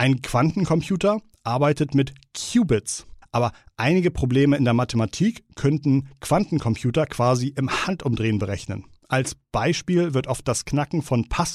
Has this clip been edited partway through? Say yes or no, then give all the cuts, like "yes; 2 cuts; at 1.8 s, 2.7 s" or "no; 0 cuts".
yes; 1 cut; at 3.2 s